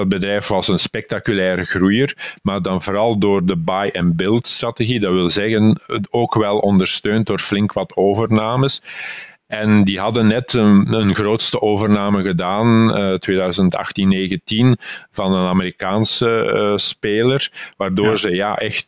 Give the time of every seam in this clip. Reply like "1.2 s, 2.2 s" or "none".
none